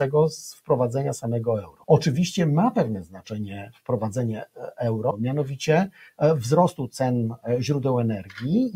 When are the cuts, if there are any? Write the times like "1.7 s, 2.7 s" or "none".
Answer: 1.8 s, 5.1 s